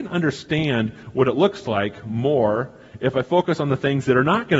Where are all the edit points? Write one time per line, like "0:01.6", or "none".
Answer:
none